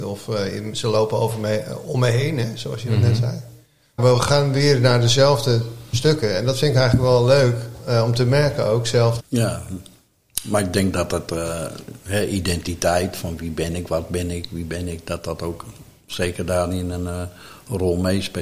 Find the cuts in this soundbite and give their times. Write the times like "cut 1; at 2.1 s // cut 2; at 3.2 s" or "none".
cut 1; at 4.0 s // cut 2; at 9.2 s